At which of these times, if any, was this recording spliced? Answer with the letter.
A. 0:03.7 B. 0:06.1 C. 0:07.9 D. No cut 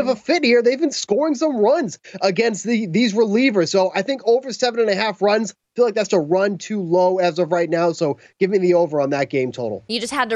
B